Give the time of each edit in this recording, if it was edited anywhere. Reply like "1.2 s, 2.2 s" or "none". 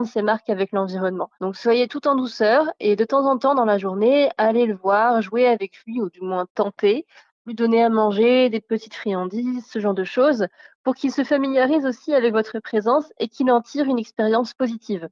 none